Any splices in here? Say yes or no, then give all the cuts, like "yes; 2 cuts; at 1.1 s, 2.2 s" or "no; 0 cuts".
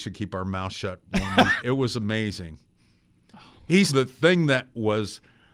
yes; 2 cuts; at 1.6 s, 3.9 s